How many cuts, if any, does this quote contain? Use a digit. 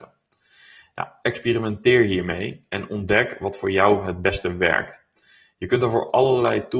1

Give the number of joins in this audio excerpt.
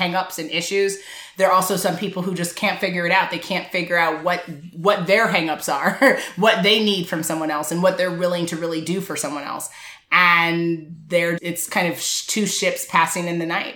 1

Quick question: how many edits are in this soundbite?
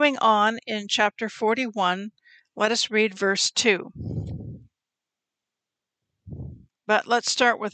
0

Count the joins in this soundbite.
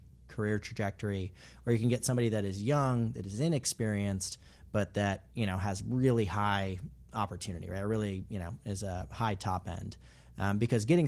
0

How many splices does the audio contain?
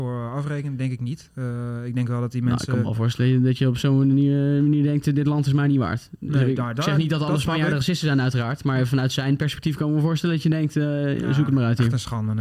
0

